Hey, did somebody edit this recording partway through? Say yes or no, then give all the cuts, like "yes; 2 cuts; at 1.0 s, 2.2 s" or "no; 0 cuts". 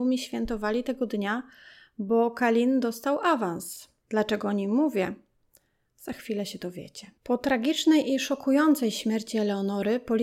yes; 2 cuts; at 4.0 s, 7.2 s